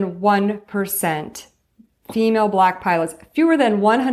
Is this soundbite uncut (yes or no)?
yes